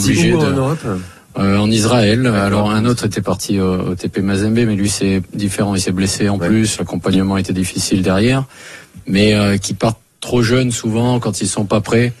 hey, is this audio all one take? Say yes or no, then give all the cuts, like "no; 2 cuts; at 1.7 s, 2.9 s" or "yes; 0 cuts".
no; 1 cut; at 6.8 s